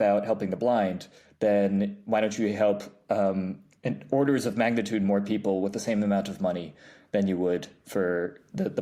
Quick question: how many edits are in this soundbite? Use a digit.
0